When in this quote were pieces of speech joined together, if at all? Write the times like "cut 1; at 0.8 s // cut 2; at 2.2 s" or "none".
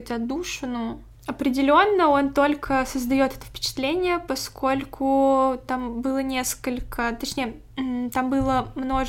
none